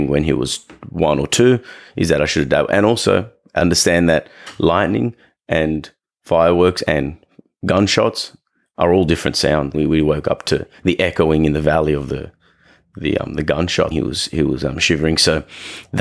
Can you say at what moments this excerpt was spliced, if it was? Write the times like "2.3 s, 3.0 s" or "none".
9.7 s, 13.9 s